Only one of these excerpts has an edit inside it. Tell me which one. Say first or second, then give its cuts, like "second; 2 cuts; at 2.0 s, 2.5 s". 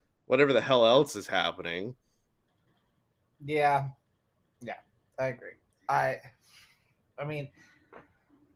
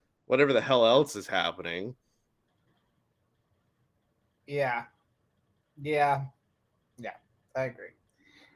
first; 2 cuts; at 3.3 s, 5.9 s